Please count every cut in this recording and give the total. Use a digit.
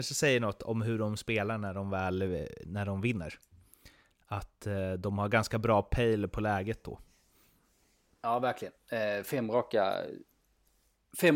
0